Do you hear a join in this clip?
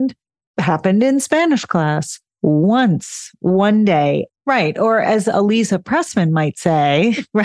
yes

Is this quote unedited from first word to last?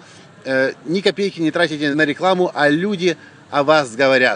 no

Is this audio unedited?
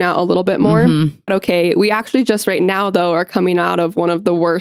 no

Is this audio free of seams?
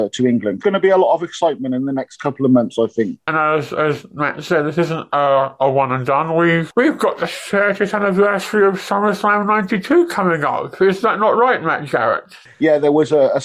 yes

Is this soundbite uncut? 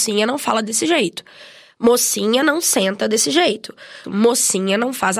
no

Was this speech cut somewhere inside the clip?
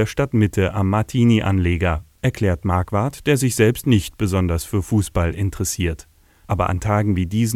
yes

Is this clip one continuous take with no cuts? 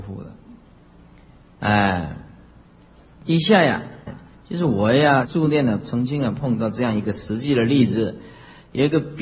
no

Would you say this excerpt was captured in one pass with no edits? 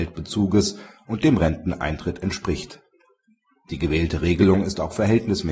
yes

